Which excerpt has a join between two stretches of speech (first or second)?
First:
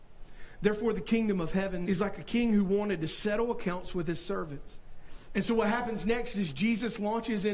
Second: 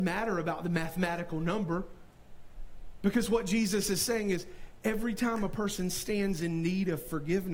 first